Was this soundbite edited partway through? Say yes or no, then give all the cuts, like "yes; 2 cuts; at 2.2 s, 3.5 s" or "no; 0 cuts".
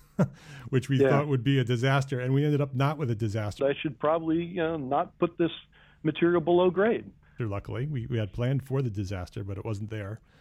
yes; 2 cuts; at 3.6 s, 7.4 s